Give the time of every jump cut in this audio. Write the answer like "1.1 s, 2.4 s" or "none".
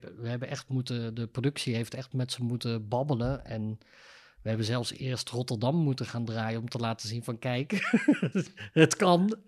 8.3 s